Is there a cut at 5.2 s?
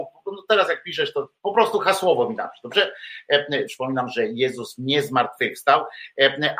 no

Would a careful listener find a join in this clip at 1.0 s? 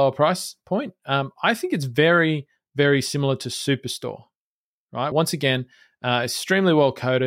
no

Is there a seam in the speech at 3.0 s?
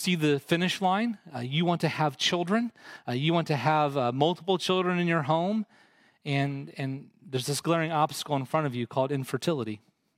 no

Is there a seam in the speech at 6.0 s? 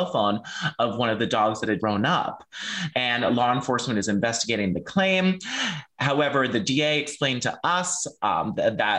no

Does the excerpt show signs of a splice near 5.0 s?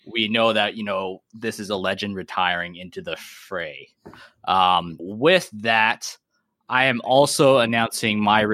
yes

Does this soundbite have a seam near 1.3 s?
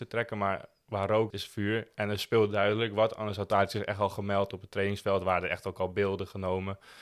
yes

